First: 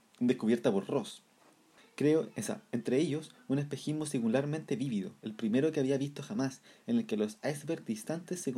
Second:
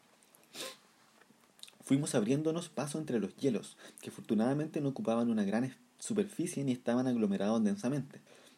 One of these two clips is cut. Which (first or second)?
first